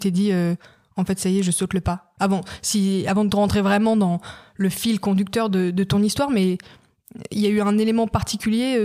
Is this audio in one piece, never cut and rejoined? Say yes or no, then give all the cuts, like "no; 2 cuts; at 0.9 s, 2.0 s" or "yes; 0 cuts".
yes; 0 cuts